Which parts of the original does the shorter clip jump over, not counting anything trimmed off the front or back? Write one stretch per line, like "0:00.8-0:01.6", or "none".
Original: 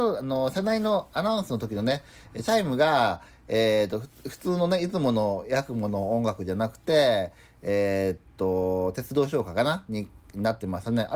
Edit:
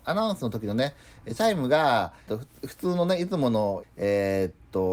0:03.4-0:03.9
0:05.4-0:07.5